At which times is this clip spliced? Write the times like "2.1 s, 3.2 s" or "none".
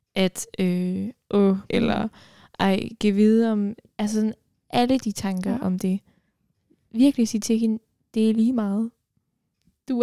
1.7 s

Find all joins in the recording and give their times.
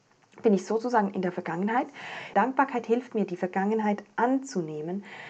2.3 s

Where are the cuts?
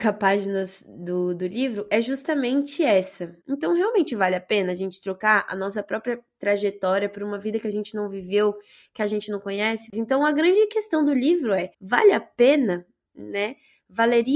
3.4 s, 9.9 s, 11.7 s

